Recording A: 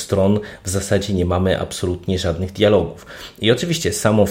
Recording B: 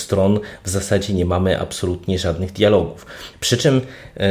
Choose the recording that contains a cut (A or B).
B